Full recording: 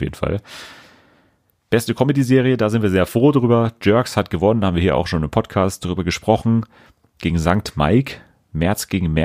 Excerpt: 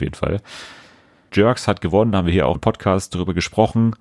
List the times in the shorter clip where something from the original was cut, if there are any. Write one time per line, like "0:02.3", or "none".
0:01.3
0:02.5